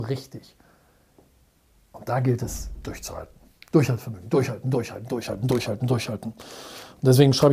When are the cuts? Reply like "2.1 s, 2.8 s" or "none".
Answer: none